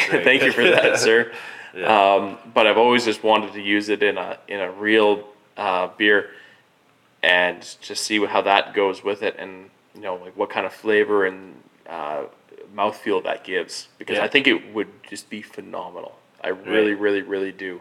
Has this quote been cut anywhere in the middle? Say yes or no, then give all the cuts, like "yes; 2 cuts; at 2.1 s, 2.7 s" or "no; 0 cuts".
no; 0 cuts